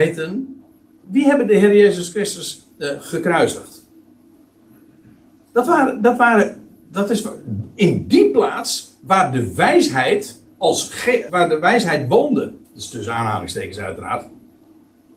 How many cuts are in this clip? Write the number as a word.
three